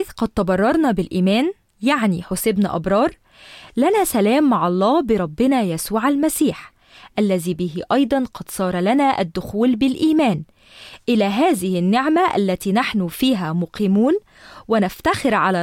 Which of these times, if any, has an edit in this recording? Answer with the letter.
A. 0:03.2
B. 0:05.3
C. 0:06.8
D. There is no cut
D